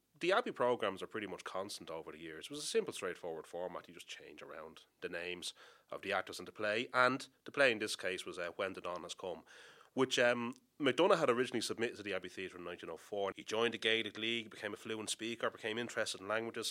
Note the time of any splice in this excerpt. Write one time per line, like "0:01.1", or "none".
0:13.3